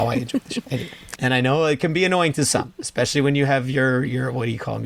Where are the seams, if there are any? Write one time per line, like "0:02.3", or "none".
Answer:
0:01.2